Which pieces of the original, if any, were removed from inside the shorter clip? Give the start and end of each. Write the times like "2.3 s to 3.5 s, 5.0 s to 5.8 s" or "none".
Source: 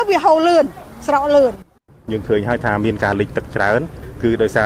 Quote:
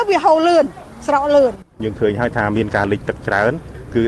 1.7 s to 2.0 s